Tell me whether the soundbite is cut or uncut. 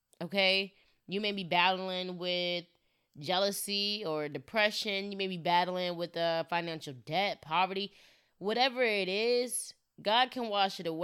uncut